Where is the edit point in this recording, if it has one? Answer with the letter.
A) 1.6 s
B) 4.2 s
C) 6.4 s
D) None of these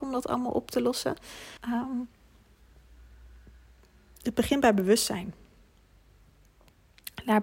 A